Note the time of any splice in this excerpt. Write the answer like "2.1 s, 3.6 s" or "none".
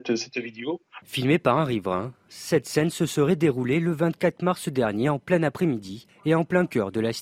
1.0 s